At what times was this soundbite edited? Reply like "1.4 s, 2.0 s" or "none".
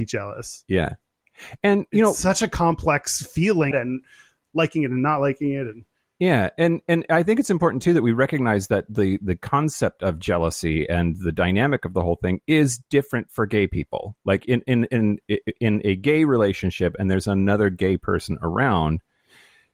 3.7 s